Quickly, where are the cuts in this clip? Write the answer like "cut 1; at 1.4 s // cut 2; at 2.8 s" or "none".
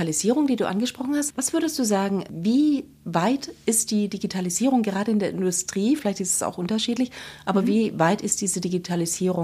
cut 1; at 6.0 s